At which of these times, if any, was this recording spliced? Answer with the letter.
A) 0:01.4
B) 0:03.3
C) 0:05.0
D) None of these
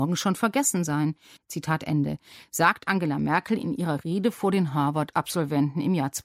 A